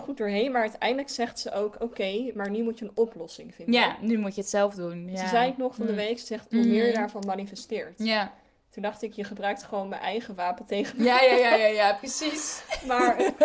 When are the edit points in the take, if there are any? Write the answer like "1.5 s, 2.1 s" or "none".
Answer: 6.5 s